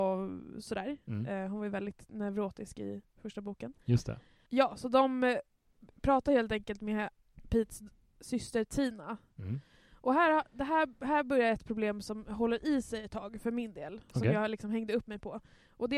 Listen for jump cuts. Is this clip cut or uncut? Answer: uncut